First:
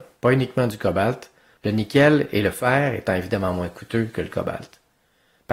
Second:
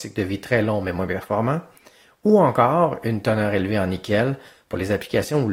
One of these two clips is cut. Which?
first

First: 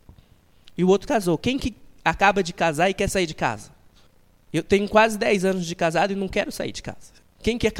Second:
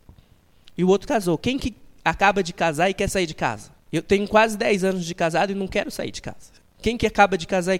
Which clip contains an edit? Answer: second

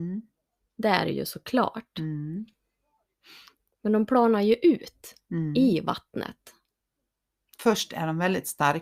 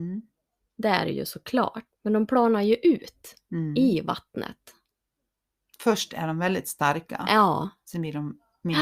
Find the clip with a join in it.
second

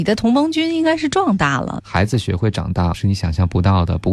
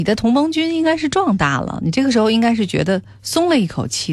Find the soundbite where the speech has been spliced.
first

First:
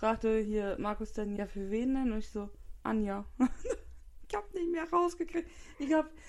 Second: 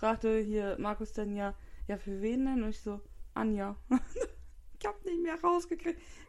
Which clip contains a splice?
first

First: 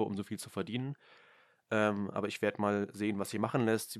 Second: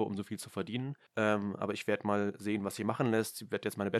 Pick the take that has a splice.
second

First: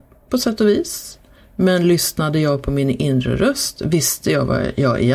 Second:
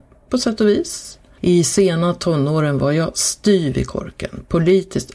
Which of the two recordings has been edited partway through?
second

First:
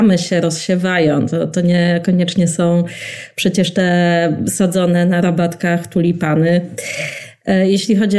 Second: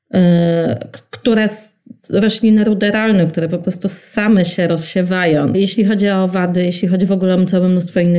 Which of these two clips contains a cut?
second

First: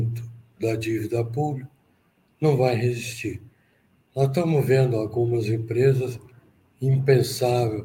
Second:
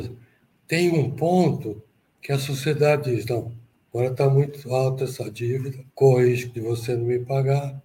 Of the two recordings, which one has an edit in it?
second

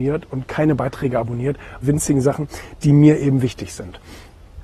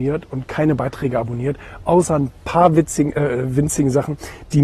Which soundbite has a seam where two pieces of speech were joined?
first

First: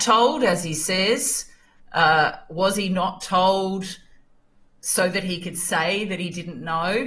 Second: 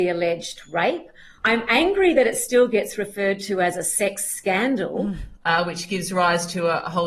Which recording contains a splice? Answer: second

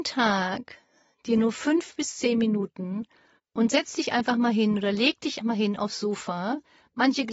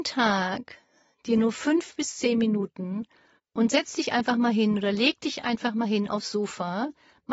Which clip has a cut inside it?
first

